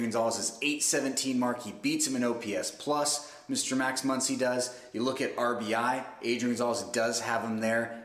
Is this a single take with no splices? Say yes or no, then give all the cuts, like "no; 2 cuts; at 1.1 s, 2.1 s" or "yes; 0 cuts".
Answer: yes; 0 cuts